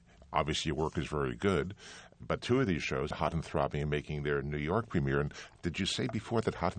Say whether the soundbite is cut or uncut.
cut